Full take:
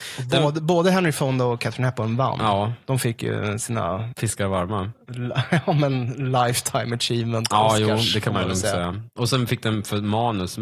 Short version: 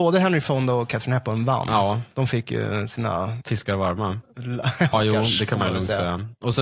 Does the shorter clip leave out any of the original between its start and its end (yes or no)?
yes